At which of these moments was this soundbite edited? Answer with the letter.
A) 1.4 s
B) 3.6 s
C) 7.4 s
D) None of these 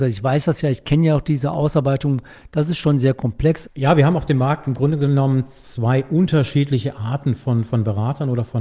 B